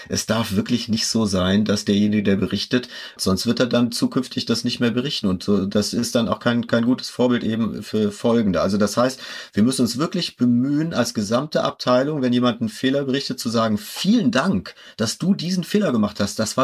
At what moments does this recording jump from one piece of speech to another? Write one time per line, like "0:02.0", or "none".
0:03.2